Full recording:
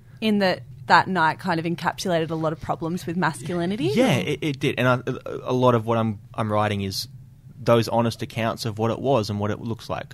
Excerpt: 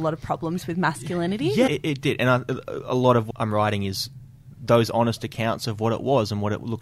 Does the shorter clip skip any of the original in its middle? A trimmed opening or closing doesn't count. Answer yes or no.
yes